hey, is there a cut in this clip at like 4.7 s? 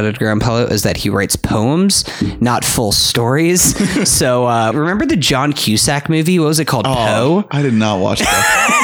yes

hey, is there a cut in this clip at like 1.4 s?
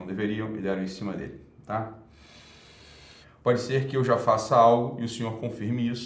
no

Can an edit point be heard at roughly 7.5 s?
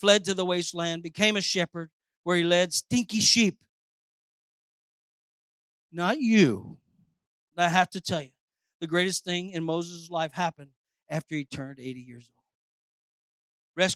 yes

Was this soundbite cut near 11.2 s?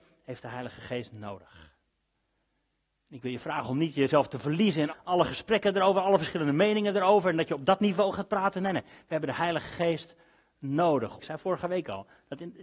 yes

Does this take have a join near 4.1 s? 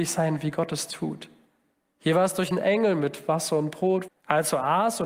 yes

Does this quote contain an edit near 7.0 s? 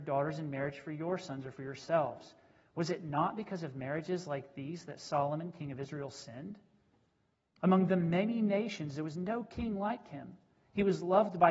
no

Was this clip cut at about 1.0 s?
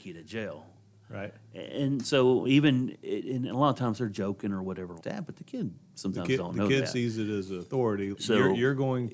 no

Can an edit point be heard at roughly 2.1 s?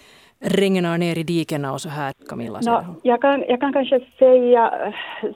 yes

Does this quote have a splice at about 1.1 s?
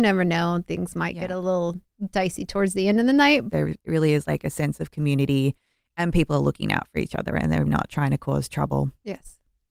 no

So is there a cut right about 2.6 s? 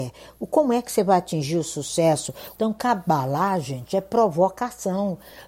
yes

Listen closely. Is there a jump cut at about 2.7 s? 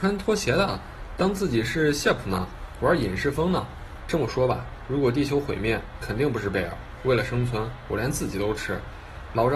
no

